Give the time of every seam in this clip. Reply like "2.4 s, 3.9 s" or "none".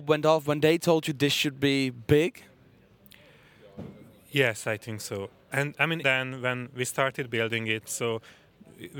6.0 s, 7.9 s